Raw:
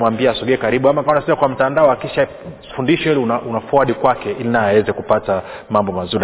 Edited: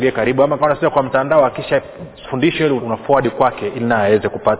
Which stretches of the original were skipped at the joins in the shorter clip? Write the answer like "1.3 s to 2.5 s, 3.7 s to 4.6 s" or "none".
3.2 s to 3.4 s